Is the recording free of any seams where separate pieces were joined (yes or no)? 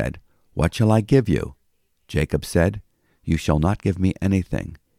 yes